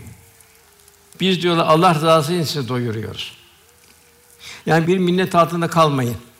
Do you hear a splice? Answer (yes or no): yes